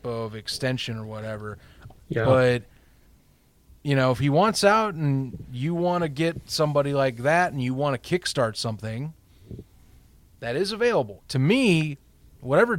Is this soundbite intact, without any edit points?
no; 2 cuts; at 2.0 s, 11.2 s

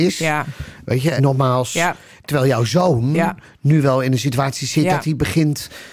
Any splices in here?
yes; 1 cut; at 1.2 s

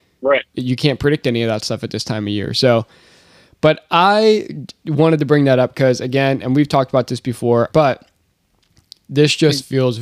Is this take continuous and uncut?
no; 1 cut; at 7.7 s

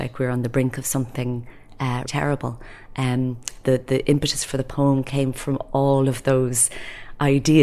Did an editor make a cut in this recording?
yes; 2 cuts; at 2.1 s, 3.6 s

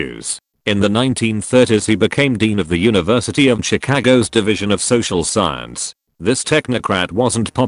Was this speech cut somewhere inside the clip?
no; 0 cuts

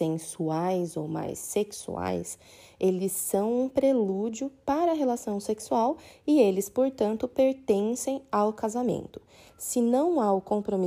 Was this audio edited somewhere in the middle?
no; 0 cuts

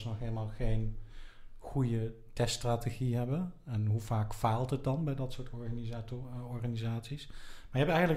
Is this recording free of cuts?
yes; 0 cuts

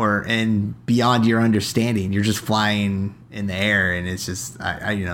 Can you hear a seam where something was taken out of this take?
no; 0 cuts

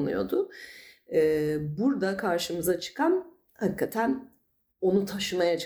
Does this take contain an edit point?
no; 0 cuts

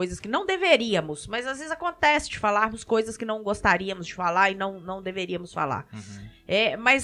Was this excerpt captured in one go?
yes; 0 cuts

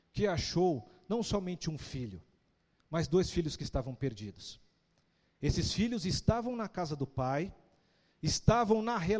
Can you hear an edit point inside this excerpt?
no; 0 cuts

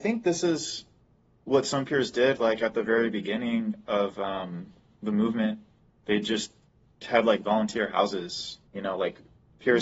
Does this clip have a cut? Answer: yes; 1 cut; at 8.7 s

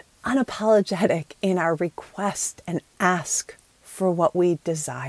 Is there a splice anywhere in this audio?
no; 0 cuts

